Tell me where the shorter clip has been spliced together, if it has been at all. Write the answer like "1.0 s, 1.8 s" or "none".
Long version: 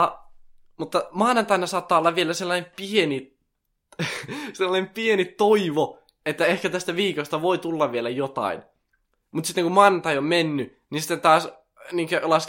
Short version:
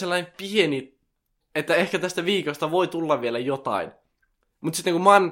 1.4 s